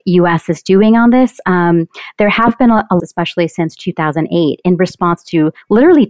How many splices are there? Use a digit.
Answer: 1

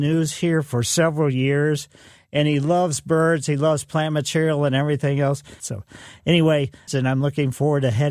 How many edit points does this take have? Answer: 2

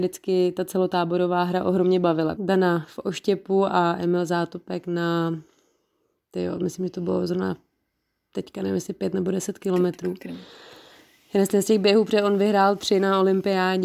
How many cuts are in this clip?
1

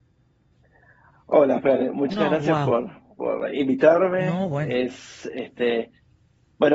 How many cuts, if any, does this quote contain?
0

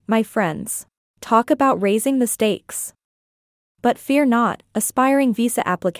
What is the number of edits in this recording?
1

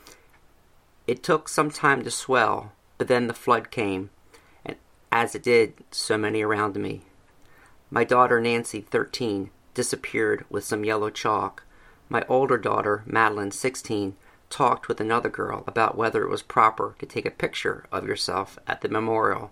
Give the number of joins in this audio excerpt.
0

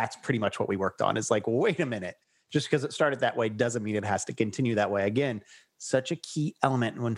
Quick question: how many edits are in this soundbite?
0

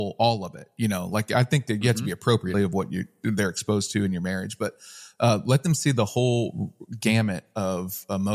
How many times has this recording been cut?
1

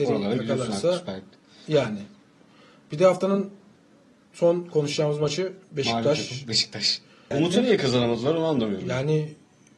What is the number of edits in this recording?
1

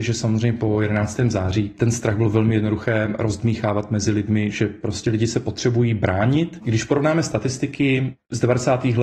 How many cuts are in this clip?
0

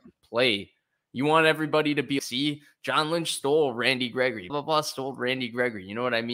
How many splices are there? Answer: 2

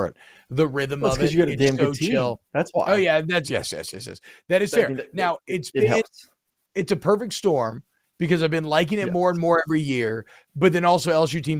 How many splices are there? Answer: 1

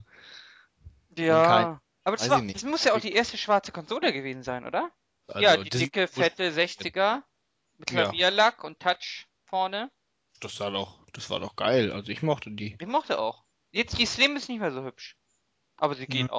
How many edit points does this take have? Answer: 1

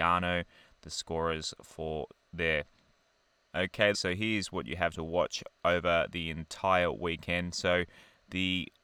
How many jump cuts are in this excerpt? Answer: 1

